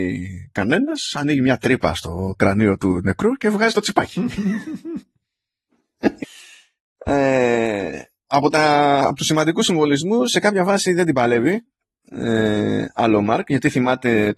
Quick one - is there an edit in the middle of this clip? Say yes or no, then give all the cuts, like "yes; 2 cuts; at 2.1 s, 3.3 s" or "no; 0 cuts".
yes; 1 cut; at 6.2 s